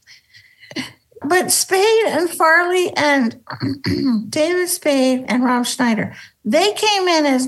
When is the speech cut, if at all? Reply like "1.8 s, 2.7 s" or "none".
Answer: 1.2 s, 5.2 s